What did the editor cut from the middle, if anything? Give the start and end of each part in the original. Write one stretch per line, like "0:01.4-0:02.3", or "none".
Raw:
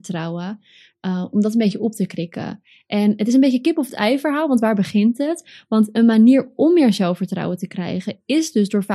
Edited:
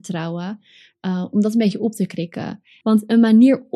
0:02.8-0:05.7